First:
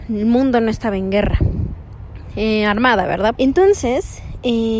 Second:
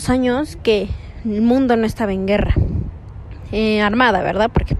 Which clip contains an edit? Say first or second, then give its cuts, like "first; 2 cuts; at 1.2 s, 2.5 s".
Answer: first; 1 cut; at 3.3 s